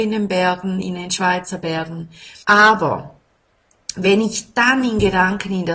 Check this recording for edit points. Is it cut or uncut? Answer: cut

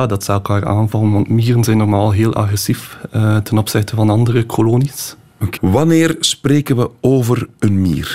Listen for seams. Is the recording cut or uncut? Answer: cut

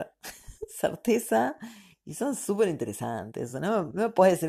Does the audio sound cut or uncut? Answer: uncut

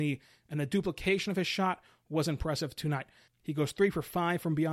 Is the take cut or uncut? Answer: cut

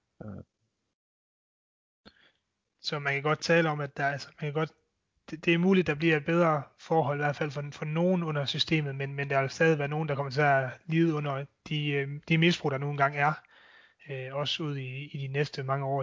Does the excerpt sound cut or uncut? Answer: uncut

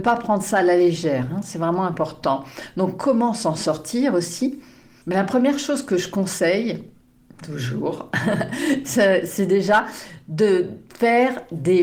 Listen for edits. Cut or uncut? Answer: uncut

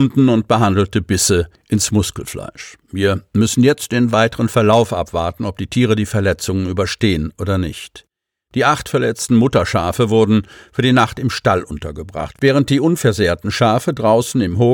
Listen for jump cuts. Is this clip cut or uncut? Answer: uncut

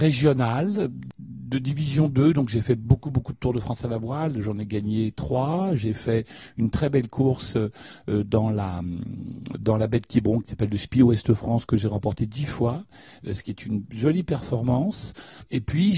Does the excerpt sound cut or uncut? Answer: uncut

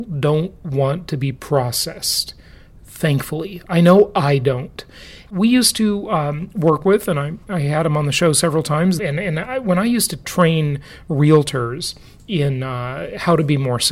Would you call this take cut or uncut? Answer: cut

